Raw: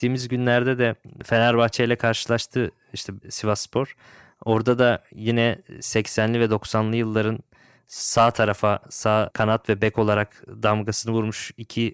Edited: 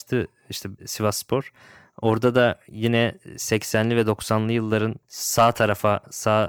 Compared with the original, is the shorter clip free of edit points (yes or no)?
no